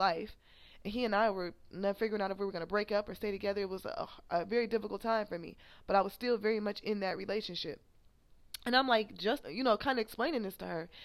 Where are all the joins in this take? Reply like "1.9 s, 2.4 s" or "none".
9.4 s